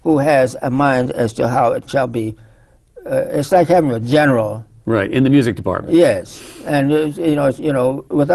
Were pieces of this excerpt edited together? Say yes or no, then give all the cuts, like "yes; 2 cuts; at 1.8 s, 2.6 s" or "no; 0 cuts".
no; 0 cuts